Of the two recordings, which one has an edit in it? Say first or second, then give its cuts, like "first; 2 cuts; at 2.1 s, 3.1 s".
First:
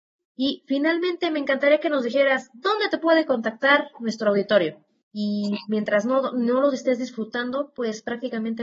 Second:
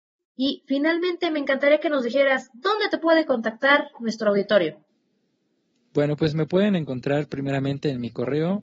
first; 1 cut; at 5.0 s